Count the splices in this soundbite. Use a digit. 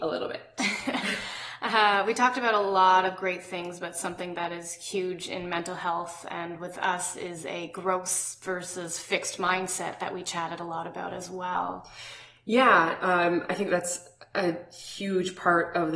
0